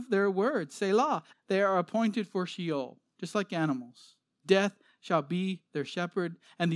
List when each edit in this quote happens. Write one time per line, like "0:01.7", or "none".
0:01.3